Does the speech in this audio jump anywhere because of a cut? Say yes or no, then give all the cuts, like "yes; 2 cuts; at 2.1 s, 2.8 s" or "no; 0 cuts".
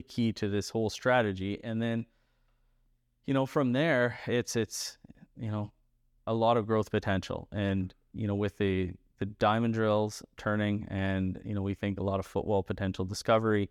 no; 0 cuts